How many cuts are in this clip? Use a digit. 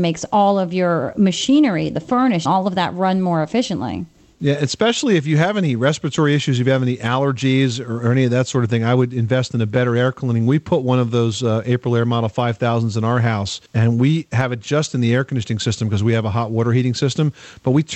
2